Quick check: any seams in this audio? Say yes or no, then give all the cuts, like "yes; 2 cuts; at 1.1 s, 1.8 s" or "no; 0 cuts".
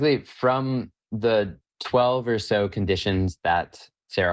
no; 0 cuts